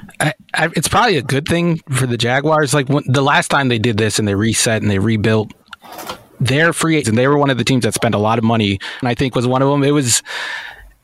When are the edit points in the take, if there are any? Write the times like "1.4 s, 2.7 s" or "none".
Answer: 7.0 s, 9.0 s